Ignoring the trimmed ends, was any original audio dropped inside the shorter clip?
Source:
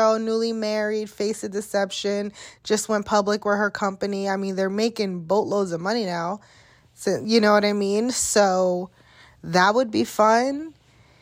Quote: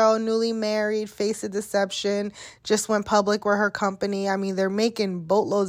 no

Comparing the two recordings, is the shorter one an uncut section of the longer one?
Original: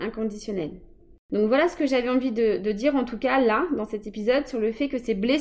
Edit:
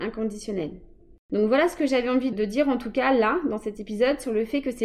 no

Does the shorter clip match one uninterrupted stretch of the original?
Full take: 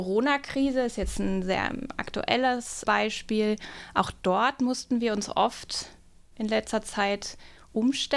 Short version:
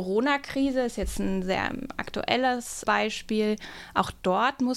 yes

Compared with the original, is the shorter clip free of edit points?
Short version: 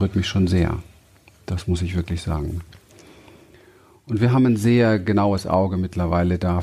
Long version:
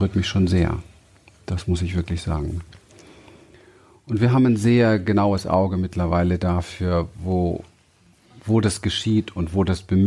yes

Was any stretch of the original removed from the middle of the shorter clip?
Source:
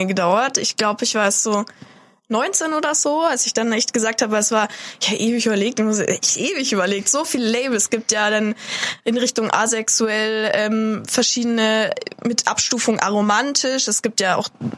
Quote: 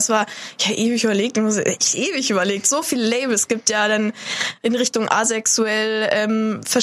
no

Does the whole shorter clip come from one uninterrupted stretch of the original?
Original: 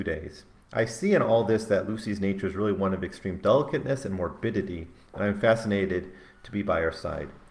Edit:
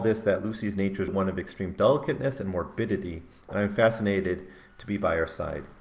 no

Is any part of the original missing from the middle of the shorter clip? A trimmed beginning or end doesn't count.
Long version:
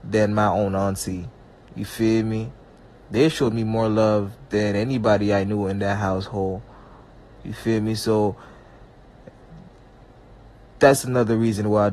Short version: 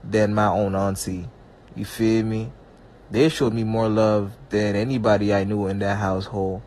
no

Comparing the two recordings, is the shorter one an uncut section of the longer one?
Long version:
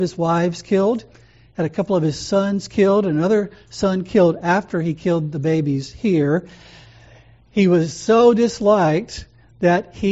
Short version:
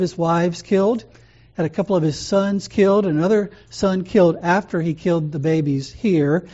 yes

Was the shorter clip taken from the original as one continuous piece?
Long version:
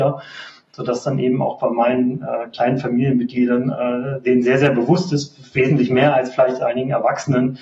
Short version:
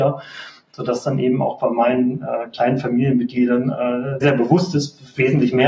no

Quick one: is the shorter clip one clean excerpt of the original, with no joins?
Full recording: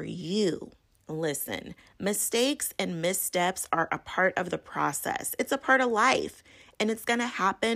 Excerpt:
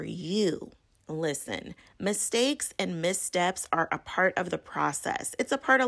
yes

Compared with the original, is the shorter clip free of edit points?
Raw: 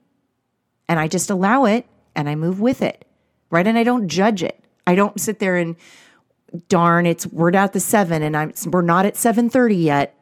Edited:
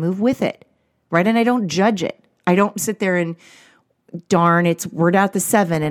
yes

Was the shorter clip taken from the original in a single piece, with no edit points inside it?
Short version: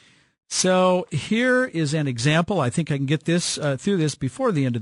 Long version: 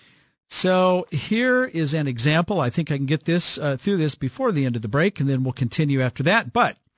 yes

